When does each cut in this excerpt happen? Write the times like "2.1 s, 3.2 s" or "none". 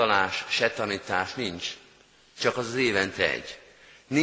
none